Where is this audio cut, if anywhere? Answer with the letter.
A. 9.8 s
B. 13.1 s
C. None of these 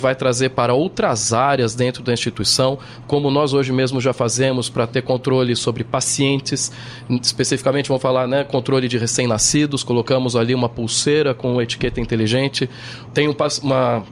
B